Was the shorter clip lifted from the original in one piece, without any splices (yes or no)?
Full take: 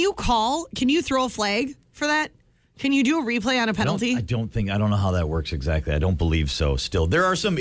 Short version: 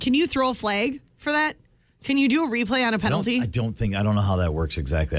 yes